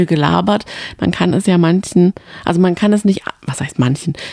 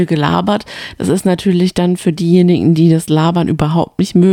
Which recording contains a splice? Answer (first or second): first